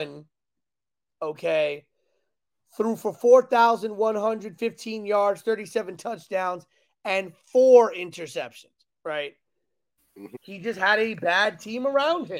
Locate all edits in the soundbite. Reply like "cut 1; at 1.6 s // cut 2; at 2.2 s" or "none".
cut 1; at 8.9 s // cut 2; at 10.3 s